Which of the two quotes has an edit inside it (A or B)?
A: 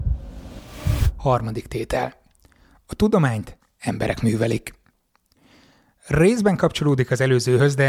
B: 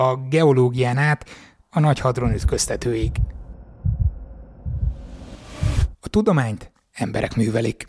B